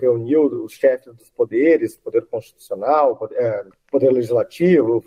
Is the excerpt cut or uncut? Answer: cut